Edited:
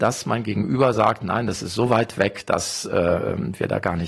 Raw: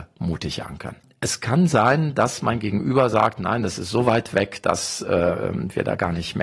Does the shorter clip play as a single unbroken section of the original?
yes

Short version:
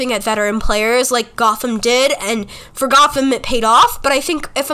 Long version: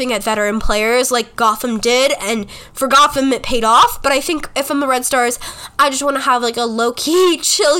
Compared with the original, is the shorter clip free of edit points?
yes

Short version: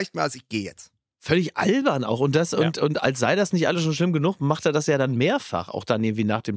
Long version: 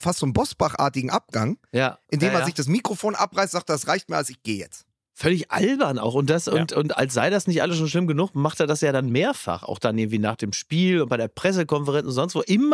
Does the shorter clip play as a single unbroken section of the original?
yes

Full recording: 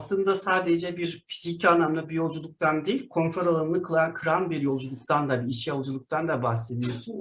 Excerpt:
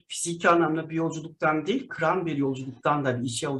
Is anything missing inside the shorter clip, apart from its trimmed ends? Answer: yes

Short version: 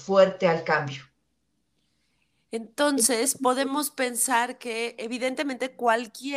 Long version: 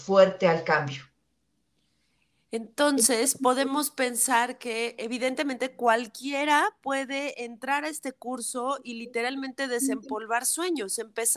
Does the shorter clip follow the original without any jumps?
yes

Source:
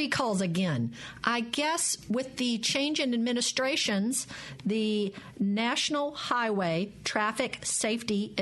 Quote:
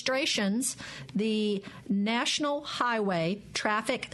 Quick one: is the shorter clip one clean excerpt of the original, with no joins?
yes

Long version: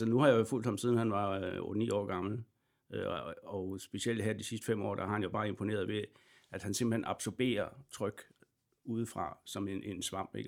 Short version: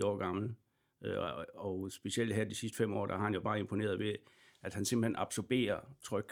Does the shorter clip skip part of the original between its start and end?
no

